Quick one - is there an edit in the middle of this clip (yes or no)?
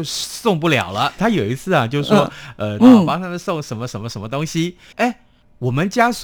yes